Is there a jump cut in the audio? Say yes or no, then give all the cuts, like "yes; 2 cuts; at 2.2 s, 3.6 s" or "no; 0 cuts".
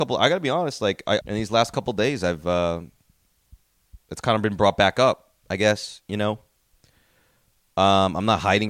yes; 2 cuts; at 1.2 s, 5.4 s